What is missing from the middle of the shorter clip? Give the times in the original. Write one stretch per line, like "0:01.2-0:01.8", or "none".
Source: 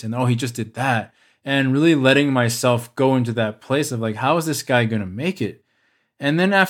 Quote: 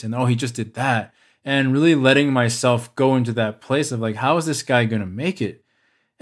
none